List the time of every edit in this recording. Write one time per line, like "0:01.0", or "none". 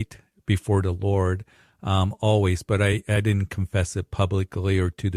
none